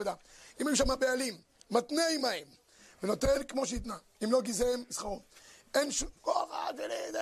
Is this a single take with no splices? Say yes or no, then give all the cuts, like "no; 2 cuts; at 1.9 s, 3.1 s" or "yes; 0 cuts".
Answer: no; 1 cut; at 6.1 s